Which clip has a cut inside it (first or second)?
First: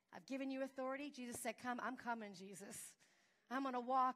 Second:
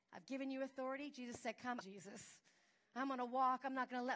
second